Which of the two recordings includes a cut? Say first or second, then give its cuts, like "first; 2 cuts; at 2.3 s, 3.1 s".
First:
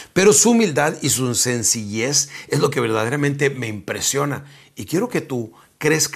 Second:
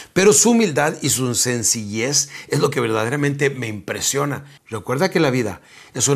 second; 1 cut; at 4.6 s